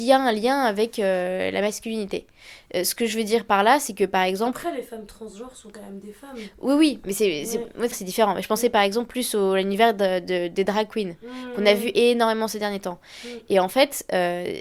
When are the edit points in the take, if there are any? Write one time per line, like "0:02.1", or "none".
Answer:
0:07.9